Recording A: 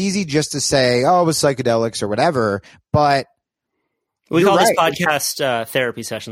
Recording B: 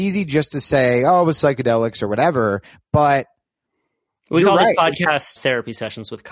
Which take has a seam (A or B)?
B